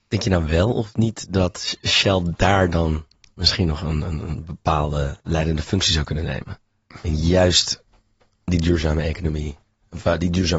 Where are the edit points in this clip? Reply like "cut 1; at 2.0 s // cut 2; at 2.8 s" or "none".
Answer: none

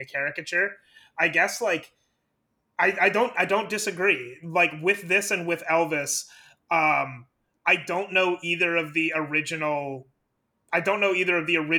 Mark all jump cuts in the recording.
none

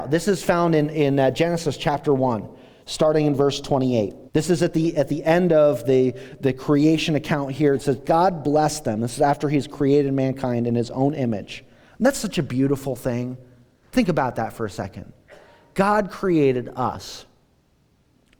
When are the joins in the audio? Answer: cut 1; at 4.3 s

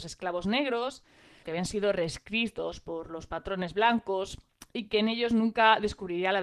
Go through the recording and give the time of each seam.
cut 1; at 1.4 s

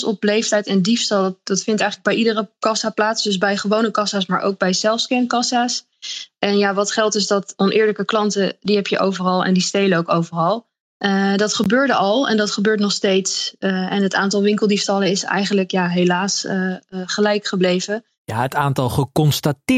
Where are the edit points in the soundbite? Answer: none

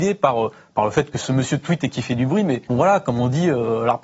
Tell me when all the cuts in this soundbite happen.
cut 1; at 2.7 s

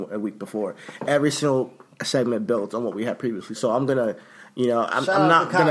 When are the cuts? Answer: cut 1; at 3.5 s

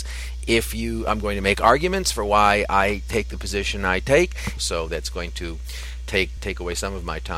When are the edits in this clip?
cut 1; at 4.6 s // cut 2; at 6.4 s

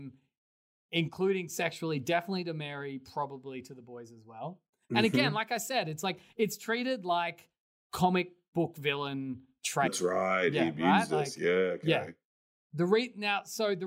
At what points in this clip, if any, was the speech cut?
cut 1; at 9.9 s

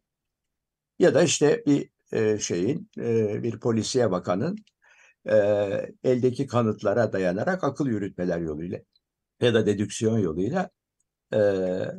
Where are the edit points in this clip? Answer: none

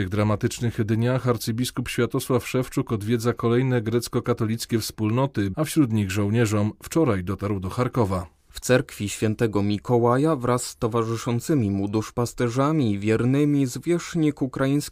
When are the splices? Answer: cut 1; at 5.5 s

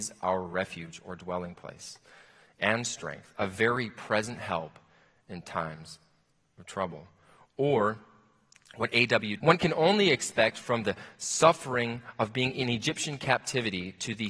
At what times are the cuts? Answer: cut 1; at 9.4 s

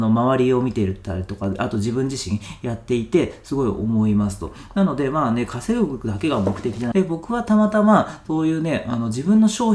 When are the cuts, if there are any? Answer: cut 1; at 6.9 s

